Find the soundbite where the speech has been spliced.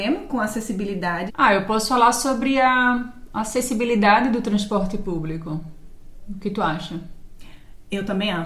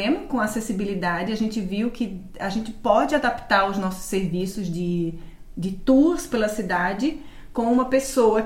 first; 1 cut; at 1.3 s

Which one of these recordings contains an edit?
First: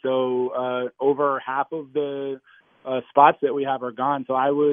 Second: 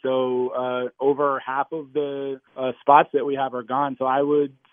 second; 1 cut; at 2.5 s

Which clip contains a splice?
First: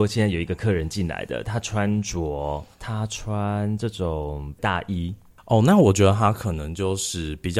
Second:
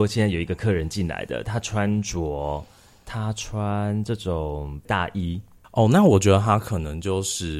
first; 1 cut; at 2.7 s

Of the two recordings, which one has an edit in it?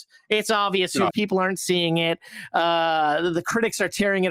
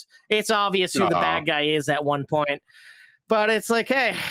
first; 1 cut; at 1.1 s

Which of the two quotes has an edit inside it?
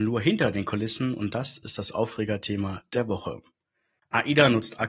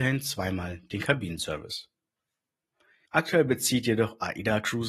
second; 1 cut; at 3.1 s

